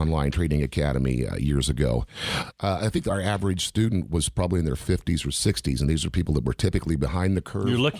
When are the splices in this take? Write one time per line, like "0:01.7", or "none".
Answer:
none